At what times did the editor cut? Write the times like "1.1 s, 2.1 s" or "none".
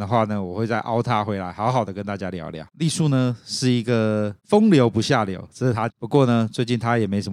2.7 s, 5.9 s

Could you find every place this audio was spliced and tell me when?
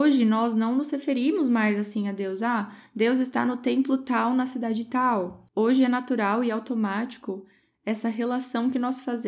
none

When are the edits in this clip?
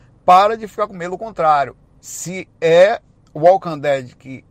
2.0 s

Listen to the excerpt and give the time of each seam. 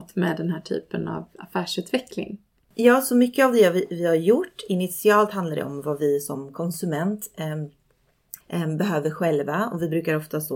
8.4 s

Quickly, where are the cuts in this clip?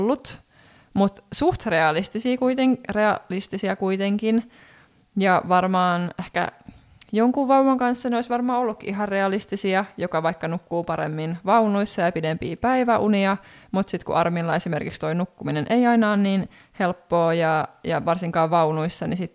none

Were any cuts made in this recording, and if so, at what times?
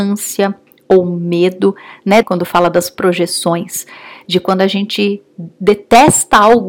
2.2 s

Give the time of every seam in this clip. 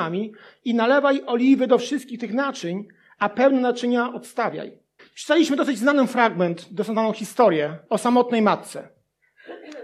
5.0 s, 7.9 s

